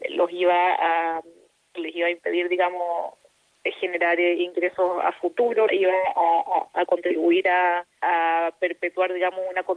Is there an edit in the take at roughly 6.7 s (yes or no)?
yes